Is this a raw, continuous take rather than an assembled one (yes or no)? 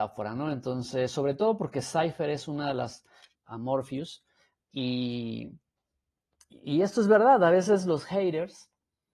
no